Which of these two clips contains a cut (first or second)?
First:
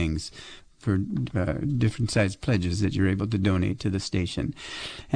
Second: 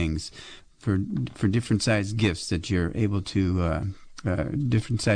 first